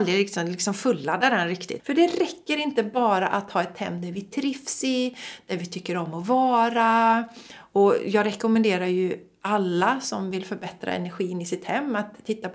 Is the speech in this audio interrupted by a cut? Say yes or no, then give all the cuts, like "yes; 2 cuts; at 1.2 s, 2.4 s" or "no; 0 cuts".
yes; 1 cut; at 1.8 s